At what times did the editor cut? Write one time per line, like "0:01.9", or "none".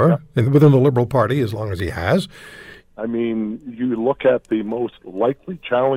0:02.8